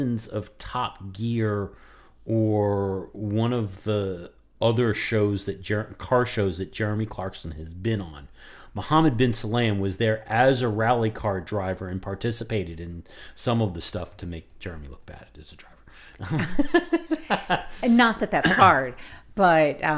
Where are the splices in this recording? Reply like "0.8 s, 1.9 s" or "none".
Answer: none

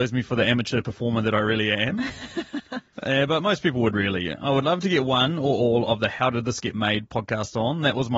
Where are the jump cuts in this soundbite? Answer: none

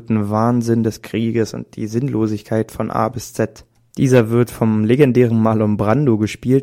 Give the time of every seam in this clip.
3.9 s

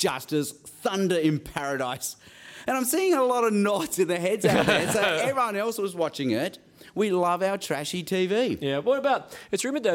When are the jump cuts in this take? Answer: none

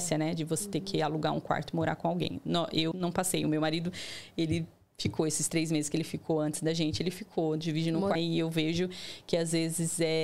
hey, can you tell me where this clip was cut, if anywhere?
2.9 s, 8.2 s

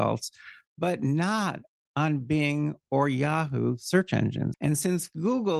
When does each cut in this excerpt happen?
4.5 s

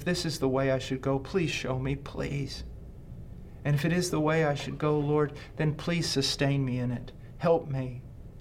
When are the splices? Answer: none

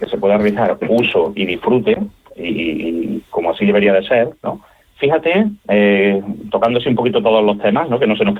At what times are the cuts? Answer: 4.8 s

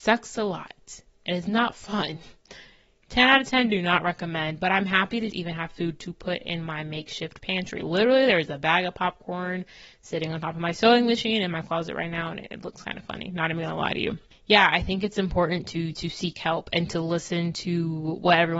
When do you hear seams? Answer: 5.3 s

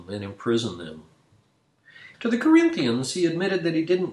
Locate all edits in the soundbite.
2.1 s

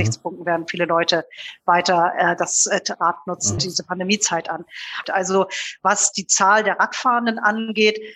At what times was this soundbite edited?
3.6 s, 5.0 s

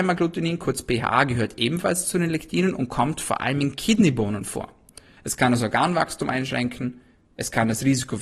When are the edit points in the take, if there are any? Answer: 5.2 s

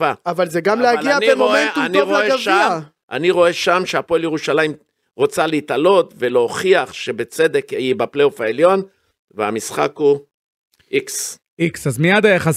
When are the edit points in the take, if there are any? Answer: none

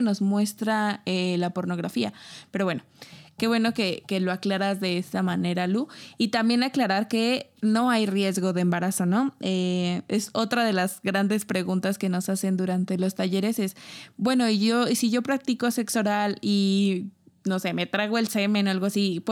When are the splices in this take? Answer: none

